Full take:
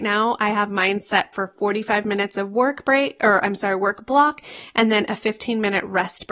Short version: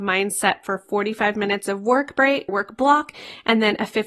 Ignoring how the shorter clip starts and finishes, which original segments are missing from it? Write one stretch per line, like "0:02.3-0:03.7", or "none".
0:03.2-0:03.8